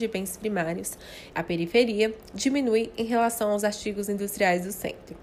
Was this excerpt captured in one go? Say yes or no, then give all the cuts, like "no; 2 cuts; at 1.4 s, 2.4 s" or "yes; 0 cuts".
no; 1 cut; at 1.3 s